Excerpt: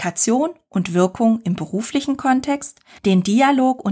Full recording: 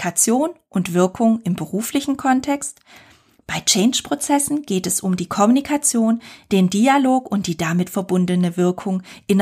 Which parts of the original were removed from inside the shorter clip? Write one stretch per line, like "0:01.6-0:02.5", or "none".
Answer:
0:03.0-0:06.4